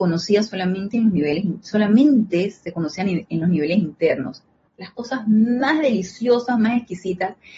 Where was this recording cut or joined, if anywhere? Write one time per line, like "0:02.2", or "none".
0:04.7